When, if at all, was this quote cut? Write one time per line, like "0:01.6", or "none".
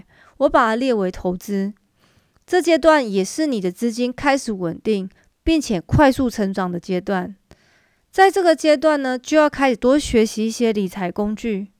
none